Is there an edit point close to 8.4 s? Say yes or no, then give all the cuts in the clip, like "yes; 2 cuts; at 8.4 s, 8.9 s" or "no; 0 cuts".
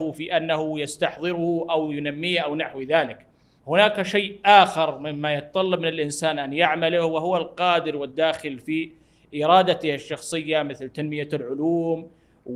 no; 1 cut; at 3.6 s